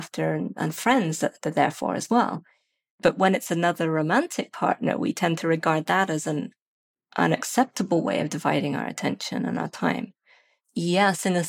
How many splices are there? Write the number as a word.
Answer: one